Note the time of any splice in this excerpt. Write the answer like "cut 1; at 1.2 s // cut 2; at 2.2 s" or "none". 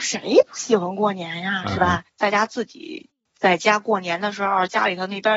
cut 1; at 2.1 s